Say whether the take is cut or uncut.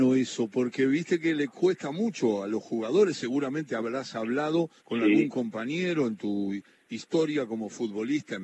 cut